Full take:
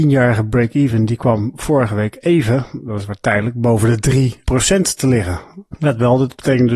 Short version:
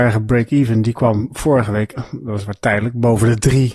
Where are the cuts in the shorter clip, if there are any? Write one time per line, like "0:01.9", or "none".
0:02.0